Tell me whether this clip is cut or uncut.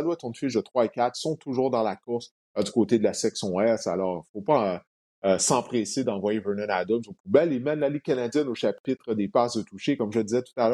uncut